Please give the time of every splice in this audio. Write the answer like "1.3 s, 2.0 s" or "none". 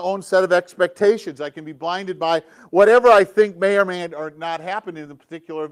none